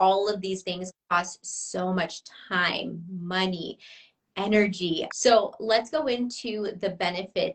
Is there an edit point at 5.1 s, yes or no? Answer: yes